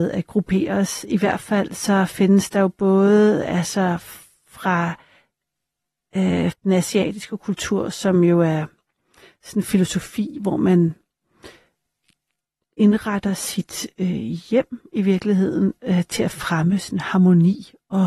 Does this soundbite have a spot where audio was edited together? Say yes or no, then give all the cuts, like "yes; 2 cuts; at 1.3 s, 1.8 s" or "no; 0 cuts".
yes; 1 cut; at 6.5 s